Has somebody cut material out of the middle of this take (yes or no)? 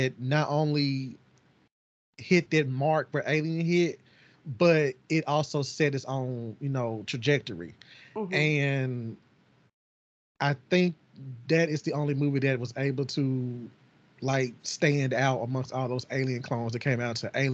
no